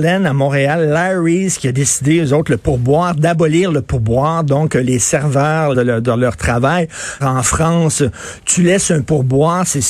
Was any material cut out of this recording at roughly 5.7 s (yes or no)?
yes